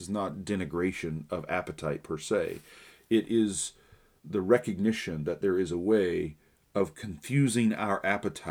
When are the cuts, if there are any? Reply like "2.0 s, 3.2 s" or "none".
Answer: 4.2 s